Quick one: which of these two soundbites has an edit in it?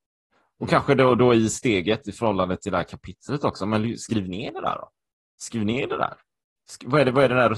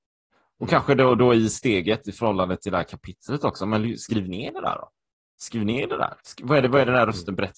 second; 1 cut; at 6.2 s

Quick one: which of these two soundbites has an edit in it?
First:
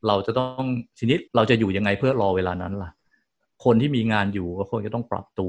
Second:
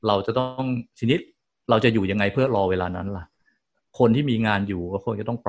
first; 1 cut; at 1.3 s

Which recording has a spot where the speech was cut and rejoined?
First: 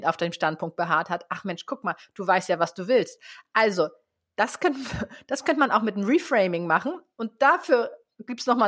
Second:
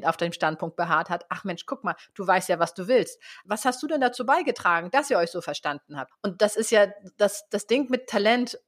second; 2 cuts; at 3.4 s, 6.1 s

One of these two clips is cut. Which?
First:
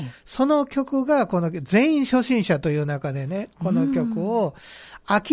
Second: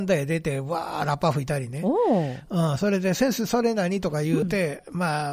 second; 1 cut; at 4.4 s

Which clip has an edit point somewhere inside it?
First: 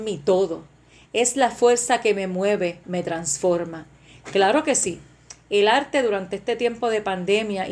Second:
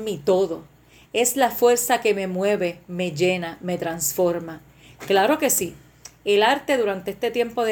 first; 1 cut; at 2.8 s

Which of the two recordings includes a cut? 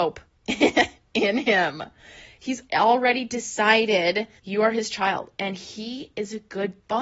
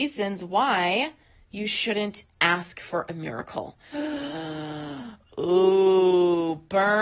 first; 2 cuts; at 2.7 s, 4.4 s

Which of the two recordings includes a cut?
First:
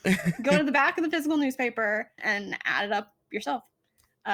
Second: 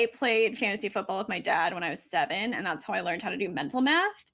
first; 1 cut; at 2.2 s

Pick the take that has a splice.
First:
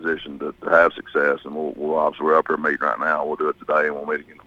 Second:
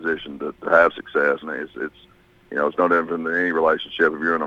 second; 1 cut; at 1.4 s

